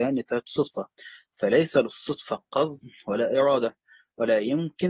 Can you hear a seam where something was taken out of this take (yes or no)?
no